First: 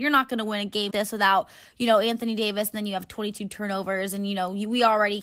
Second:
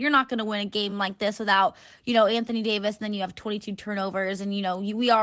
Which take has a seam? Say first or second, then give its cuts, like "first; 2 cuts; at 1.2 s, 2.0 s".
first; 1 cut; at 0.9 s